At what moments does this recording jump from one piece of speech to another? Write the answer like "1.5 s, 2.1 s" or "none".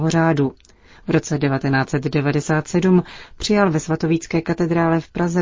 none

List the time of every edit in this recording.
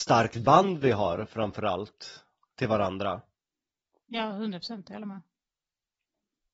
none

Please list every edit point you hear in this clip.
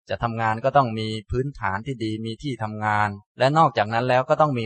3.3 s

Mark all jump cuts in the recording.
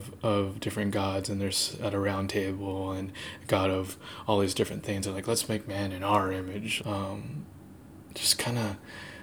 6.8 s

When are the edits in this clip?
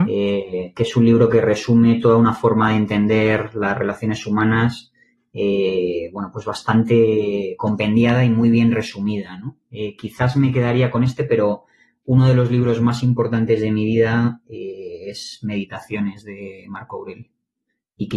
none

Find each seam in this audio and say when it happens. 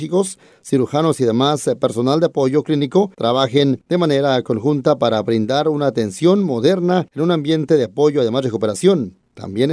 3.1 s

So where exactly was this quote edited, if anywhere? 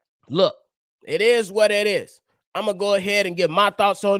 none

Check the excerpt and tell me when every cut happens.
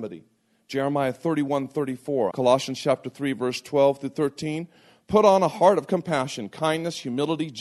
2.3 s

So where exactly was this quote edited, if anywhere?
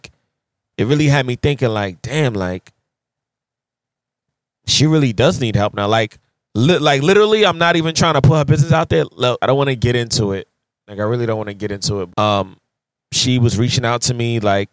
9.4 s, 12.1 s

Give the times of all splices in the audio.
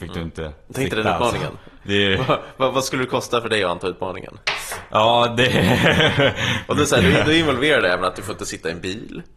1.8 s

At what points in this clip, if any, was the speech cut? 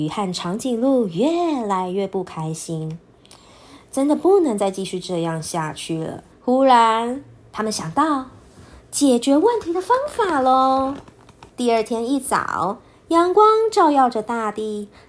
6.3 s, 11.5 s

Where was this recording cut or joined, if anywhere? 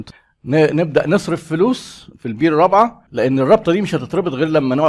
3.1 s

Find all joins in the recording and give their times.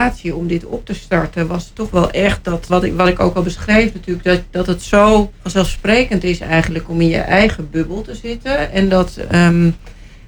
2.7 s, 5.4 s

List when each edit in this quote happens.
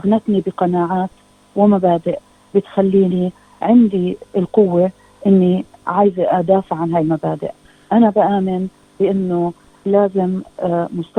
none

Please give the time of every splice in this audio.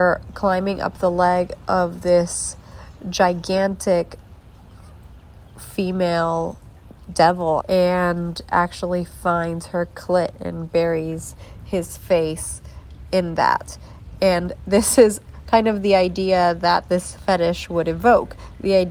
7.6 s

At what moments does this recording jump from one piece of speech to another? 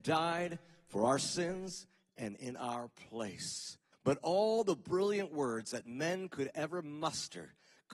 3.9 s

